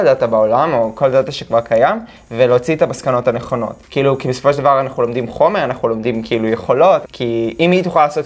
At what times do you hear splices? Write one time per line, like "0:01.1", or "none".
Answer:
0:03.8
0:07.0